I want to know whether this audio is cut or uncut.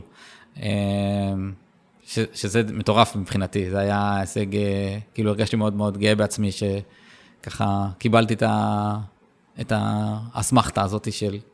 uncut